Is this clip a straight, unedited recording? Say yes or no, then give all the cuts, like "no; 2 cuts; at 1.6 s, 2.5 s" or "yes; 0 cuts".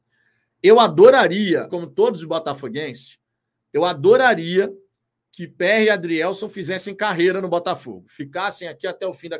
no; 1 cut; at 1.7 s